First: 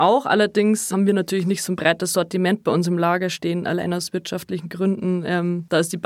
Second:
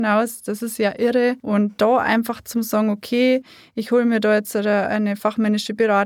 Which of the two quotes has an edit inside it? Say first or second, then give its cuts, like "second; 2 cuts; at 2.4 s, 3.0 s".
first; 1 cut; at 0.9 s